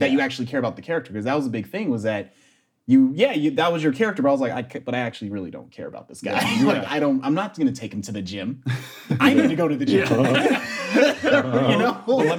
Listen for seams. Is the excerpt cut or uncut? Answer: uncut